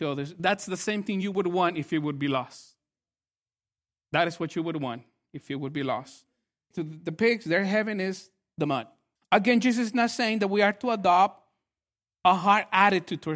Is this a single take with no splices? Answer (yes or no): no